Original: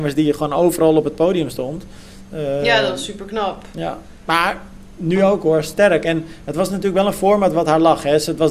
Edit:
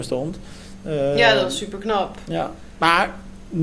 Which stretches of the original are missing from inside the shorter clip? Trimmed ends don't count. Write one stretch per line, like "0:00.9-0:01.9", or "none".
none